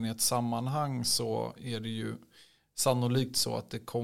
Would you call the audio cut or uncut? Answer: uncut